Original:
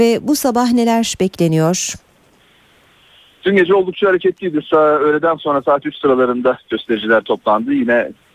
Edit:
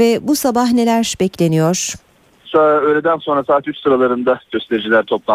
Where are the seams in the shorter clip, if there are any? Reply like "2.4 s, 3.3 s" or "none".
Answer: 2.4 s